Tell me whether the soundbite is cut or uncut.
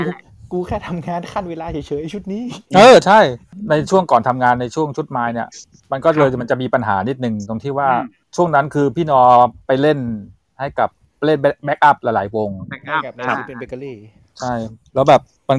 uncut